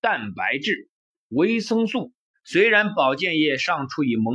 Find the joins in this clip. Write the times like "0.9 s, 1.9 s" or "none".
2.3 s

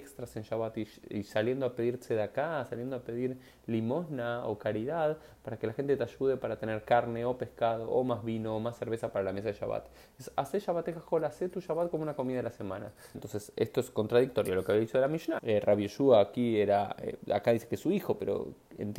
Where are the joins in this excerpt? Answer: 13.1 s, 15.4 s

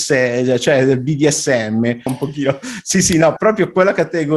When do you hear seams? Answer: 2.1 s, 3.4 s

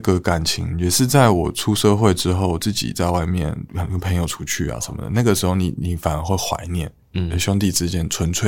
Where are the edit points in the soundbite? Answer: none

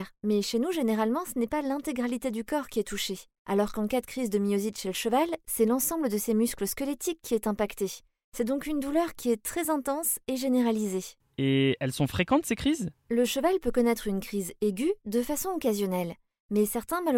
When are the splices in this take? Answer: none

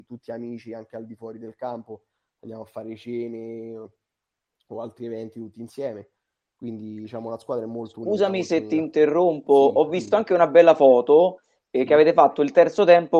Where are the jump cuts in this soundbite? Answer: none

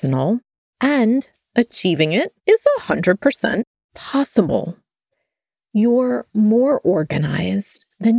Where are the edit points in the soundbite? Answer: 2.4 s

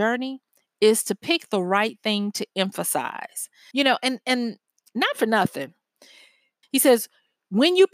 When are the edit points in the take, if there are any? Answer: 3.7 s, 6.6 s

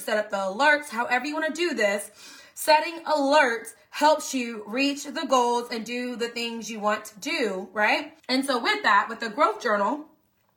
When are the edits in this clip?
8.2 s

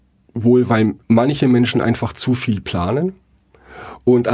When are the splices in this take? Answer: 1.0 s

